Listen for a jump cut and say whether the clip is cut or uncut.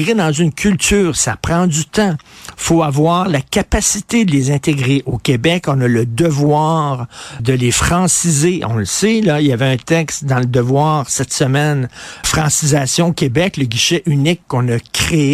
cut